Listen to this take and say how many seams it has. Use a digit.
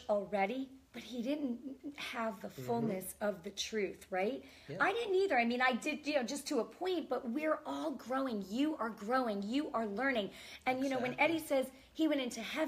0